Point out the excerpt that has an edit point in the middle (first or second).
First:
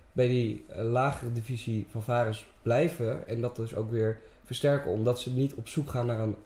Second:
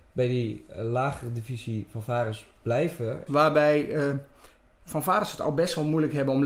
second